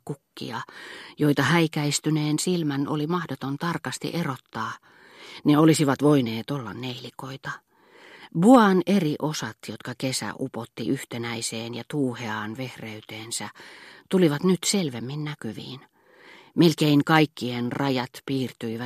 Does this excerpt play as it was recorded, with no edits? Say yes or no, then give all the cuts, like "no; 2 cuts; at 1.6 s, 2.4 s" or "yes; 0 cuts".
yes; 0 cuts